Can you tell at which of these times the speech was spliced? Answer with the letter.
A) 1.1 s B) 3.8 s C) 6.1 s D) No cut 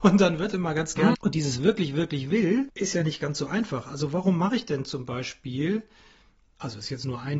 A